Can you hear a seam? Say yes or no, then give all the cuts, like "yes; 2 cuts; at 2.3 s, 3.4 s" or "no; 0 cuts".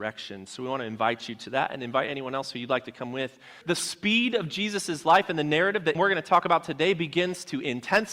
yes; 2 cuts; at 3.6 s, 5.9 s